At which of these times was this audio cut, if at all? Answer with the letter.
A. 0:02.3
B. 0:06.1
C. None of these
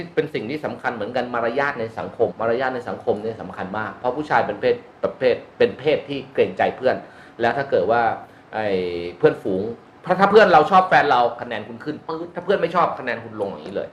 A